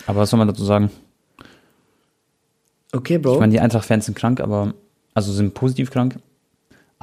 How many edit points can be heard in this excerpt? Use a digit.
0